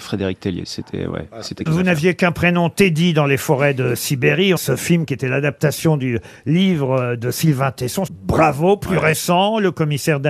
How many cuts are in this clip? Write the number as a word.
three